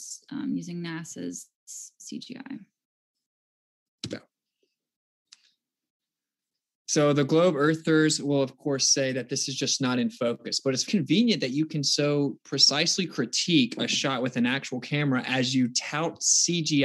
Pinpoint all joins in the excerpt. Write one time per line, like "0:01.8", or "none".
0:10.9